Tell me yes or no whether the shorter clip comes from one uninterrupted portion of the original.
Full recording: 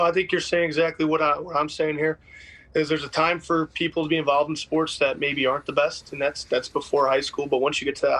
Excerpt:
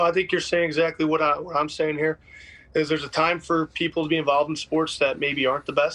yes